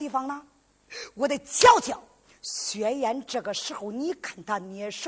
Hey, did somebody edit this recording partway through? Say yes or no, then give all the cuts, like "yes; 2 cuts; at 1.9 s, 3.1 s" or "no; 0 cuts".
no; 0 cuts